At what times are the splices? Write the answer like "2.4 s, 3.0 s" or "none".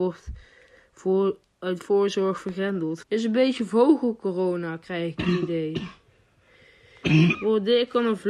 3.0 s, 7.3 s